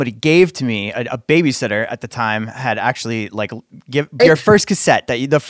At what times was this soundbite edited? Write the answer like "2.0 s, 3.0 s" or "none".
4.2 s